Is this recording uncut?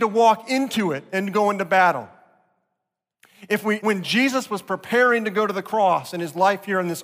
no; 1 cut; at 3.8 s

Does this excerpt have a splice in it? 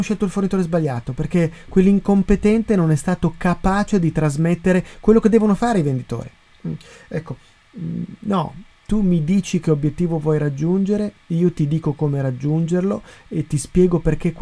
no; 0 cuts

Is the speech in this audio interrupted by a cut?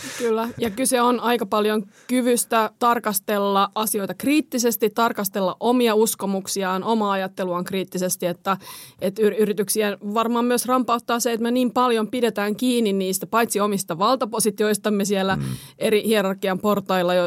no; 0 cuts

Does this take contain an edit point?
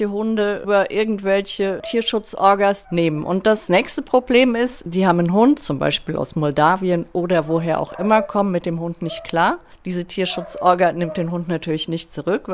yes; 1 cut; at 2.8 s

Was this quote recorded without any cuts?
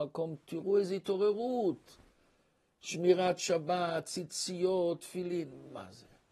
yes; 0 cuts

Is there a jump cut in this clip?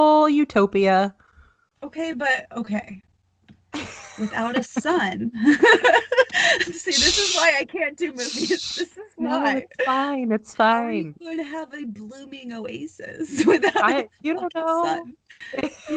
no; 0 cuts

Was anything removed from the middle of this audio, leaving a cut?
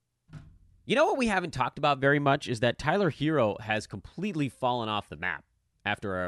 no; 0 cuts

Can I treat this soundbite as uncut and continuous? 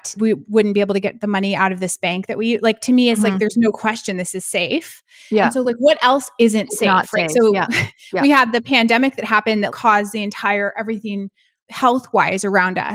yes; 0 cuts

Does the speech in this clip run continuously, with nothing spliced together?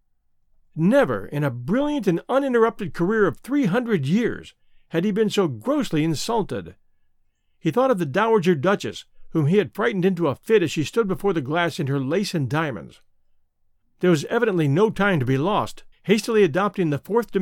no; 2 cuts; at 13.8 s, 15.9 s

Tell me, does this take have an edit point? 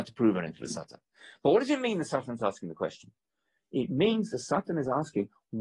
no; 0 cuts

